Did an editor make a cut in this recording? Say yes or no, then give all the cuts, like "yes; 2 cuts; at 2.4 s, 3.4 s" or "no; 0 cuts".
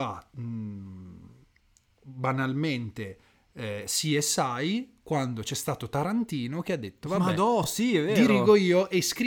no; 0 cuts